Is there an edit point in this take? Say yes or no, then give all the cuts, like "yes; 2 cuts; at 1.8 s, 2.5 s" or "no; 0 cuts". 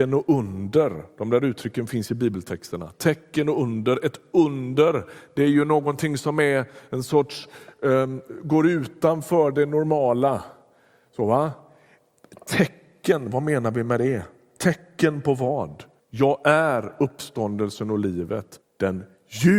yes; 2 cuts; at 16.0 s, 18.6 s